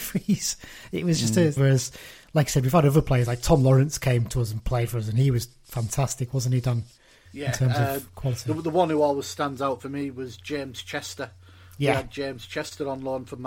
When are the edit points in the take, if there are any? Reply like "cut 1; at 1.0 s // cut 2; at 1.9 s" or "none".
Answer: cut 1; at 1.6 s